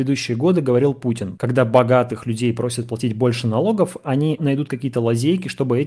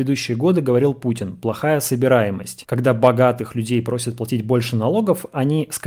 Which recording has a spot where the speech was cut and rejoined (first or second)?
first